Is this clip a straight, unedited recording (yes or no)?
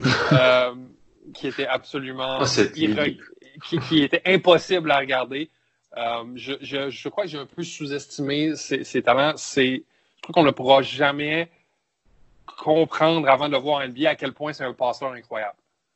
yes